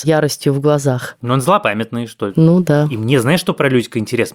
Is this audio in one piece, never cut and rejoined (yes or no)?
yes